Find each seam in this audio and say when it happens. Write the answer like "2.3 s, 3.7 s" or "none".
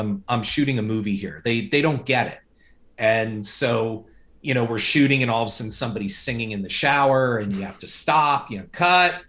none